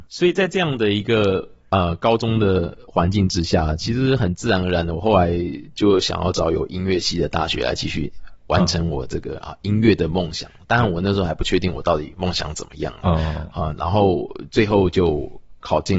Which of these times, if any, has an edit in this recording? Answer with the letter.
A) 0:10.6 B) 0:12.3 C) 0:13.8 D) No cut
B